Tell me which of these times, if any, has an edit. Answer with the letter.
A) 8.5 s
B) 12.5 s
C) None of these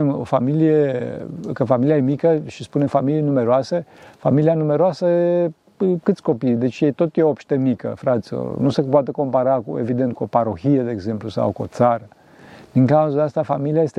C